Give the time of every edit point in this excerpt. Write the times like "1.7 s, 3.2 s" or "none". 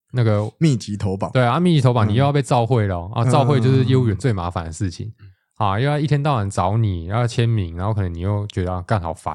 none